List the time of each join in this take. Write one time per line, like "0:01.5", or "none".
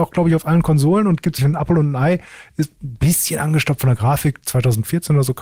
0:01.4